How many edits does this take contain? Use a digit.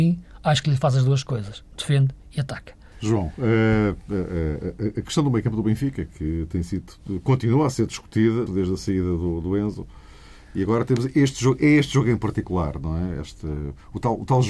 2